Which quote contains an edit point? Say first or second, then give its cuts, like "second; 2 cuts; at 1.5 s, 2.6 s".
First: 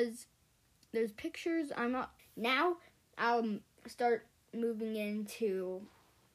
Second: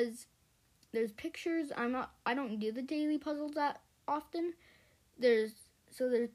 first; 1 cut; at 2.2 s